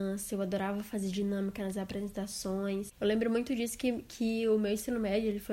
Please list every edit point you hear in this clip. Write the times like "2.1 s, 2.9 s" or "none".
none